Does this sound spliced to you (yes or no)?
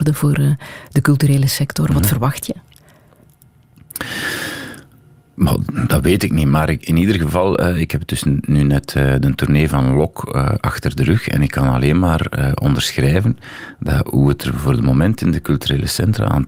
no